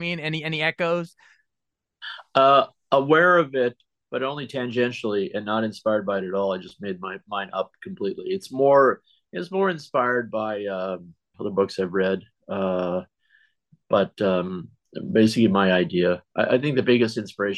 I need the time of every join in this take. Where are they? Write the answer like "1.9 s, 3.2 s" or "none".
11.3 s

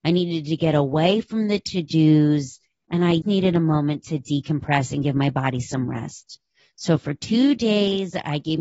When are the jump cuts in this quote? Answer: 3.2 s

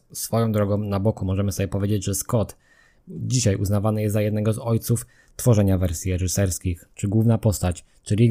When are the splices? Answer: 6.9 s

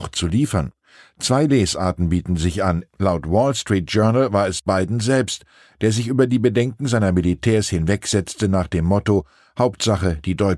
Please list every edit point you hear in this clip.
2.9 s

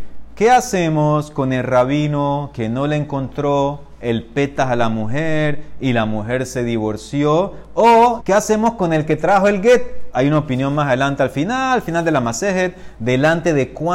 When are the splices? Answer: 8.2 s, 10.1 s

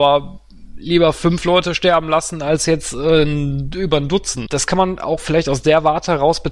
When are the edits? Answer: 4.5 s

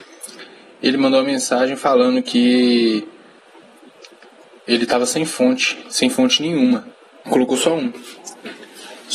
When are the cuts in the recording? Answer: 7.2 s

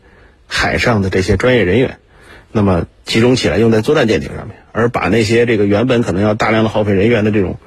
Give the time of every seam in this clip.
none

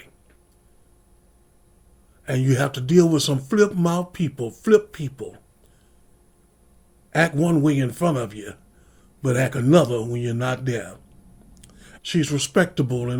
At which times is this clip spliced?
12.0 s

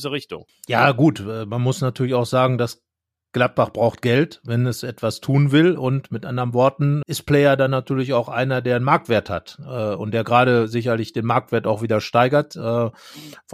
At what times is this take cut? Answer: 7.0 s

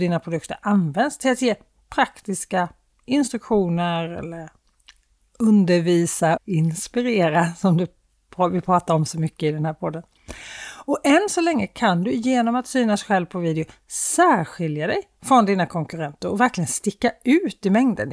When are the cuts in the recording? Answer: 6.4 s

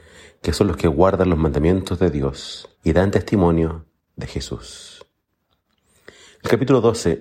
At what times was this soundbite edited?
2.7 s

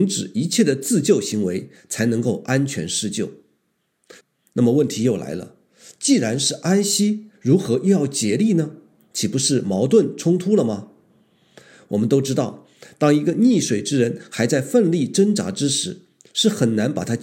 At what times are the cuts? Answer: 4.2 s

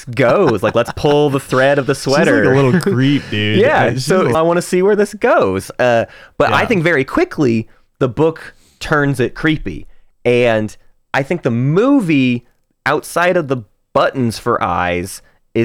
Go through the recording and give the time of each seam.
4.3 s

